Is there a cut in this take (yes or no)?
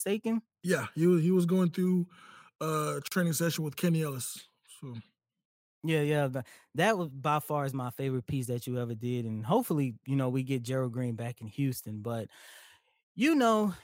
no